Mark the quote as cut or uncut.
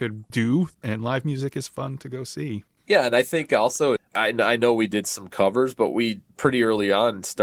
cut